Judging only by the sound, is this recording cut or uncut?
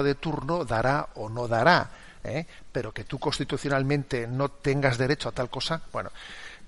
uncut